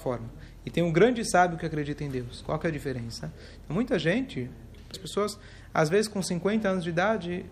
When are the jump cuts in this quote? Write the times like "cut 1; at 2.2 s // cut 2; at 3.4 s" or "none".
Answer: cut 1; at 4.9 s